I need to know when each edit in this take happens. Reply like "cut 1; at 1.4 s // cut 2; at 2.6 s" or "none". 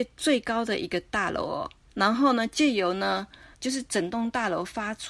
cut 1; at 1.9 s // cut 2; at 3.5 s